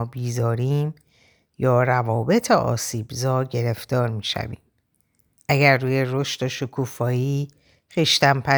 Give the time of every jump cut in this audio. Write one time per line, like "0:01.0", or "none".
0:05.3

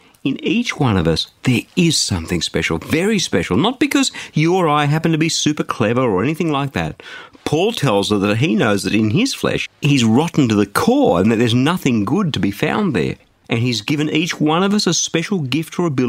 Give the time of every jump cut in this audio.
0:09.7
0:13.4

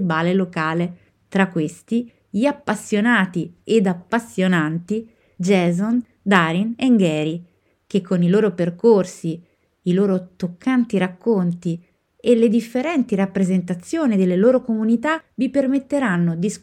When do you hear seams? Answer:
none

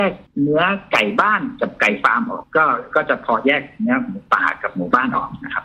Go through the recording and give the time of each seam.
0:02.4

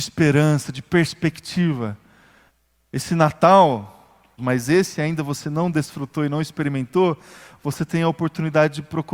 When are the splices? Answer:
0:02.8
0:04.4

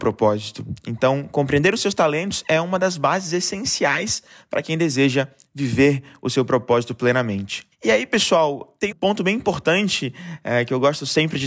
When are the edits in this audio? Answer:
0:08.9

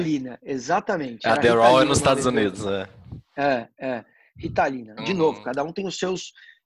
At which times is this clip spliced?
0:05.0

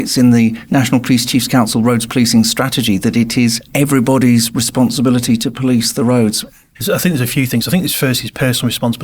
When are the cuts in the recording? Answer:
0:06.7

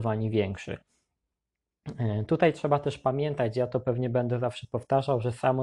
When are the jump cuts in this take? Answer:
none

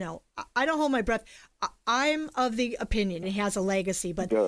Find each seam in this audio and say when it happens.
0:03.2

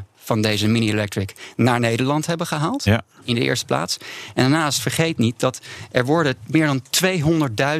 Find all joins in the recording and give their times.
none

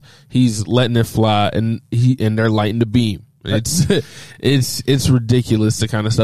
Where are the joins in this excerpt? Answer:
none

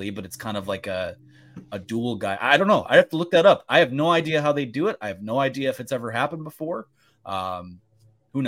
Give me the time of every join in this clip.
none

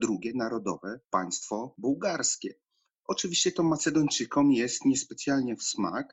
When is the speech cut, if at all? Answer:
none

